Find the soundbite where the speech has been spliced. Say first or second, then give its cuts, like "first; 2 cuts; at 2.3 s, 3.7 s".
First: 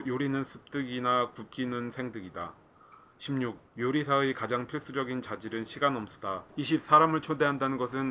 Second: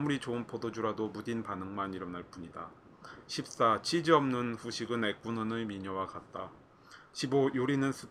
first; 2 cuts; at 3.7 s, 6.5 s